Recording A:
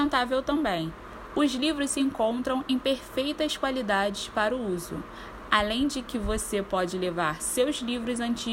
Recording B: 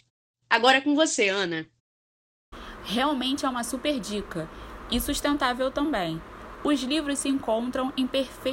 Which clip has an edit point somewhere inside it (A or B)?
B